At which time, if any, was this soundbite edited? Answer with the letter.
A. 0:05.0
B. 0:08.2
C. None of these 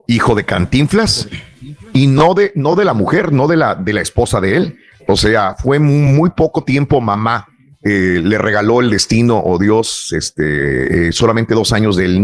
A